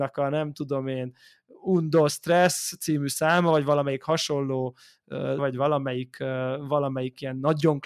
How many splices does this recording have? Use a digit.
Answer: 1